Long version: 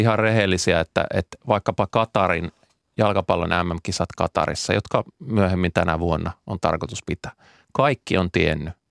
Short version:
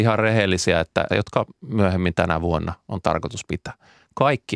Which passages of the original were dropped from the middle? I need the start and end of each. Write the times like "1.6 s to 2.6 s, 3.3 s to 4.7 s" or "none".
1.1 s to 4.7 s

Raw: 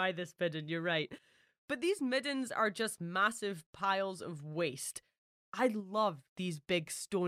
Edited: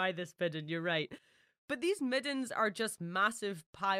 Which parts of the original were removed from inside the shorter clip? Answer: none

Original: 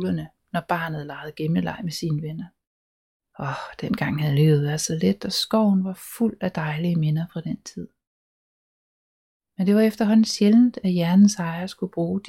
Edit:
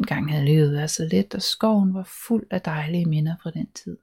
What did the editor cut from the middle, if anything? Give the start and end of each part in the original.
none

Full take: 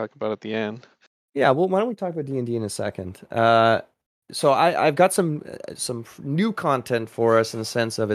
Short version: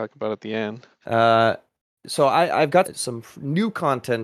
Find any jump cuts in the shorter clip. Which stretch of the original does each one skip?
1.0 s to 3.3 s, 5.1 s to 5.7 s

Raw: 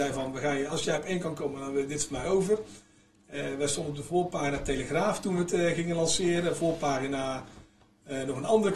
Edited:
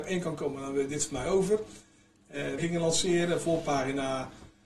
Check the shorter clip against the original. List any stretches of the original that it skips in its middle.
3.6 s to 5.7 s

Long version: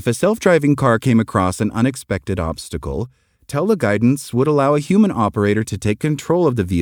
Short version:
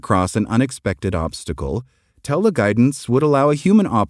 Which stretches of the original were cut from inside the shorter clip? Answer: none

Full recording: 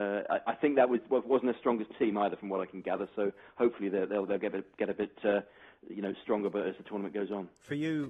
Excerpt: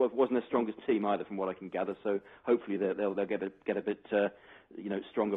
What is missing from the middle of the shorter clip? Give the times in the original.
none

